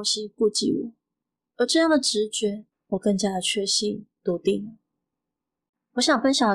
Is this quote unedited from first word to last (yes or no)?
no